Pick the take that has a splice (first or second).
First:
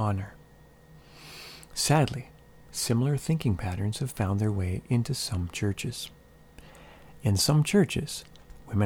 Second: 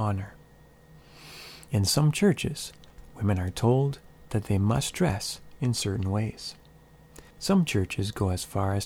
second